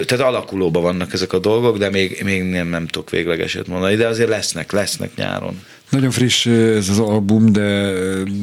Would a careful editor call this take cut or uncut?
uncut